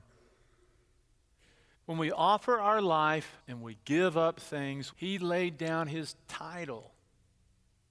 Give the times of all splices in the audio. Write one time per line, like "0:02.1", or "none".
0:01.7
0:03.4
0:04.9